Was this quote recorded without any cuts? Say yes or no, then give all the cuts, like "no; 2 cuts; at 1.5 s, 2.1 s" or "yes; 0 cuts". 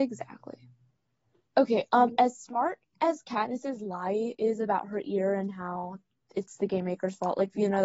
no; 1 cut; at 1.4 s